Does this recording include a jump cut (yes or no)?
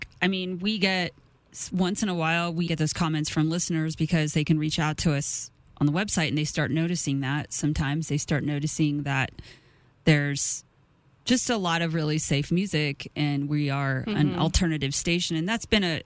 yes